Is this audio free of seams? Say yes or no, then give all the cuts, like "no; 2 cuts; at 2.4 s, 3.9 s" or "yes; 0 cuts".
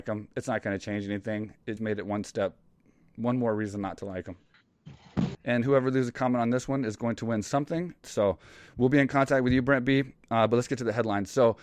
no; 3 cuts; at 1.8 s, 5.3 s, 8.0 s